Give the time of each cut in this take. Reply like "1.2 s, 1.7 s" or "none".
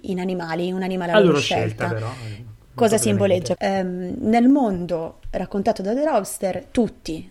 3.6 s